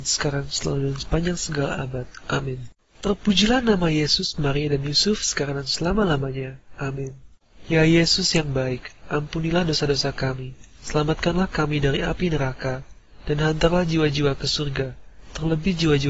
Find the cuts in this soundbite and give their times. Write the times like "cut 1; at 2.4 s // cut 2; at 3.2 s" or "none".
none